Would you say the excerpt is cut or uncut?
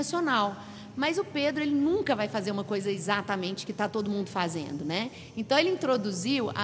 uncut